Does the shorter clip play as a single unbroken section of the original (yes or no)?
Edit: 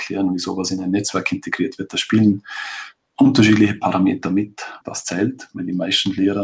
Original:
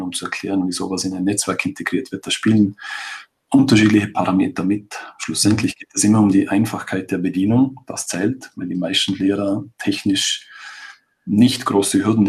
no